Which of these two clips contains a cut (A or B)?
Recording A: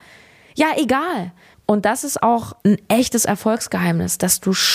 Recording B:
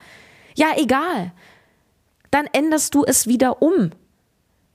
A